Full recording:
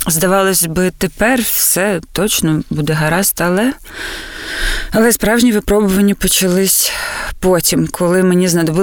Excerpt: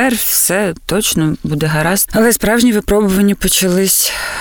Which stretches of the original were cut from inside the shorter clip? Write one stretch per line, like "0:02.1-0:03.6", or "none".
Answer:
0:03.3-0:04.9